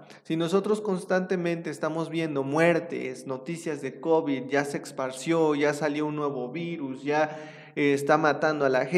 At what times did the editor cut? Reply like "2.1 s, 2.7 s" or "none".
none